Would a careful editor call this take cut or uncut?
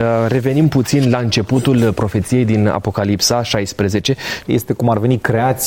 cut